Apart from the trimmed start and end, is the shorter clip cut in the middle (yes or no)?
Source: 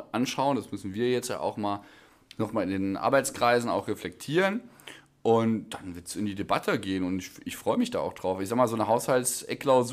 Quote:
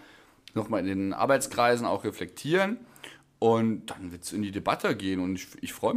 no